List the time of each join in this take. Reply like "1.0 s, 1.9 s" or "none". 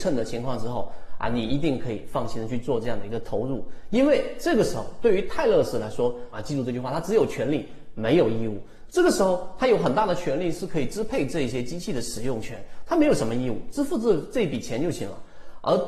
6.3 s